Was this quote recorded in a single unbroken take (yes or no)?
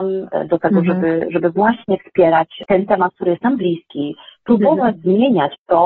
yes